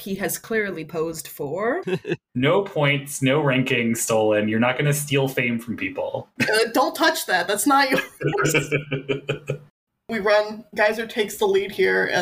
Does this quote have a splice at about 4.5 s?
no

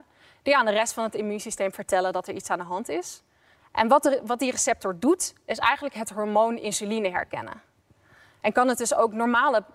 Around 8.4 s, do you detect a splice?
yes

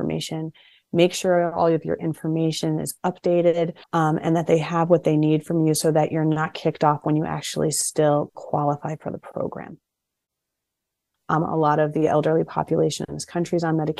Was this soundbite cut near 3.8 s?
yes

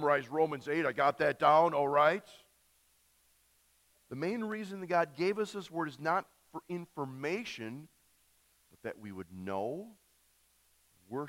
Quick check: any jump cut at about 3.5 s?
no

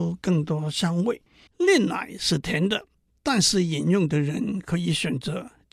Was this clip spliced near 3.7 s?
no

